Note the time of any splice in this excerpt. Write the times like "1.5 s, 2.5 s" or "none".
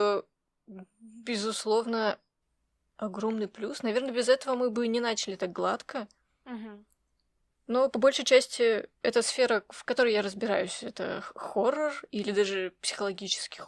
none